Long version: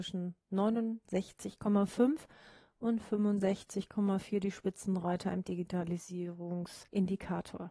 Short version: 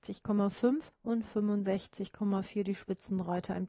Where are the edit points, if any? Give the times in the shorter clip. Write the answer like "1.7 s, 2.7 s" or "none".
0.9 s